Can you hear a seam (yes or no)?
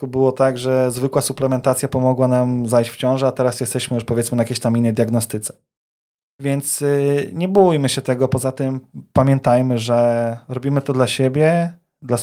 no